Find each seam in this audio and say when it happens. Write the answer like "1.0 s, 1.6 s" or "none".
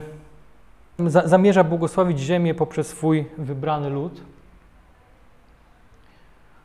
1.0 s